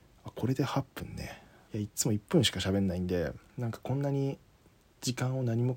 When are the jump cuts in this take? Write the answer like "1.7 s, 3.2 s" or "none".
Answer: 1.7 s, 3.5 s